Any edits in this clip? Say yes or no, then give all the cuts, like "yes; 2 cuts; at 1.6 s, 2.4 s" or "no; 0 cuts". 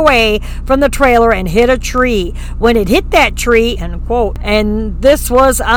yes; 1 cut; at 3.8 s